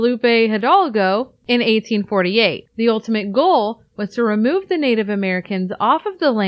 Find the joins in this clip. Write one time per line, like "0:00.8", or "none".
0:02.7